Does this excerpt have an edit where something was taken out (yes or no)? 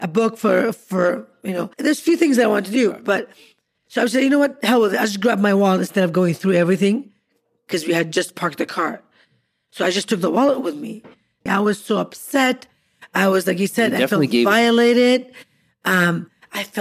yes